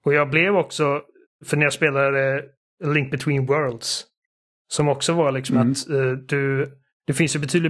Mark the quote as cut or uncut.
uncut